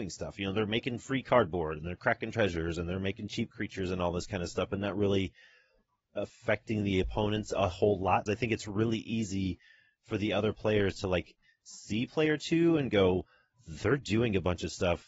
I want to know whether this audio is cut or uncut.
cut